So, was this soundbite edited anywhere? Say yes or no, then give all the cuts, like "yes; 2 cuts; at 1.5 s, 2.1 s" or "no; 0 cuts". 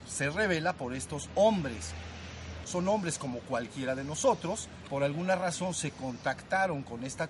yes; 2 cuts; at 2.6 s, 4.9 s